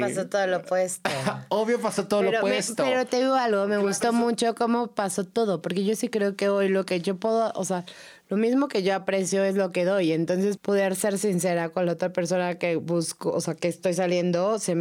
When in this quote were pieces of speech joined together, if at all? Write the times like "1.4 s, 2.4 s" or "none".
10.6 s